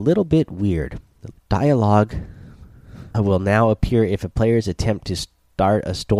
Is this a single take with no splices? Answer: no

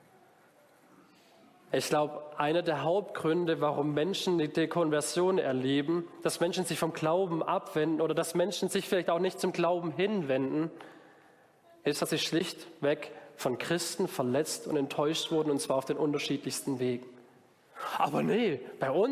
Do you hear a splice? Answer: no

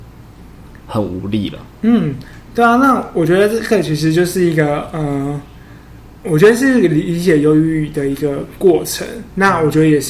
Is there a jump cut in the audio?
no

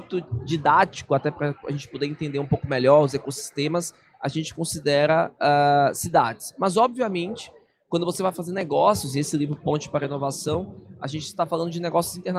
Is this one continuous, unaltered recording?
yes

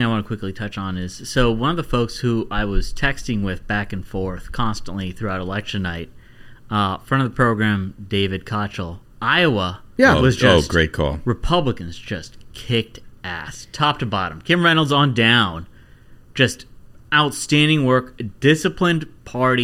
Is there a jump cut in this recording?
yes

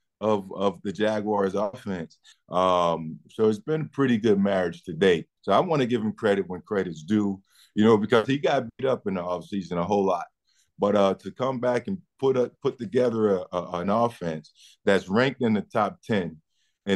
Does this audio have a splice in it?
yes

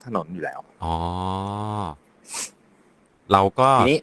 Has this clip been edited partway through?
no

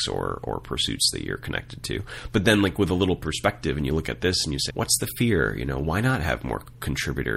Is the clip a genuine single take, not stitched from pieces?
no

